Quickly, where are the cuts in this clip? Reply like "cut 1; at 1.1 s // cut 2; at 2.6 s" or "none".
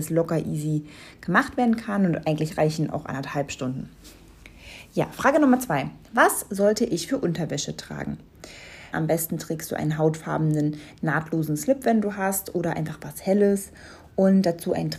cut 1; at 8.9 s